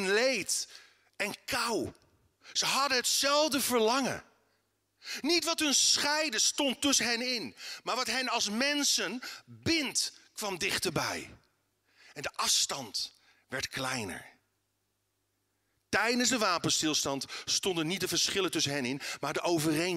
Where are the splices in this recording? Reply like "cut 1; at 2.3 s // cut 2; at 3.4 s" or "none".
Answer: none